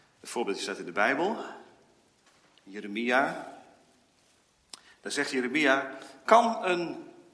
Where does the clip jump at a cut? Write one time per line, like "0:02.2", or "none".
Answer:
0:06.3